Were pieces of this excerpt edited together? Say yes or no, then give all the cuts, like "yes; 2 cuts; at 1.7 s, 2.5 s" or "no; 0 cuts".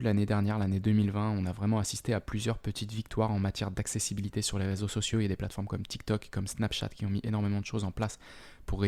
no; 0 cuts